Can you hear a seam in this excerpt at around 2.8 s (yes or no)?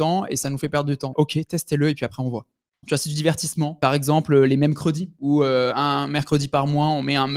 yes